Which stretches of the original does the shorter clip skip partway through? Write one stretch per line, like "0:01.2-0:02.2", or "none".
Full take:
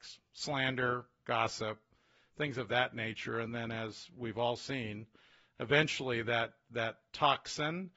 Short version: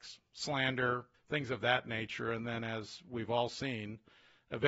0:01.1-0:02.2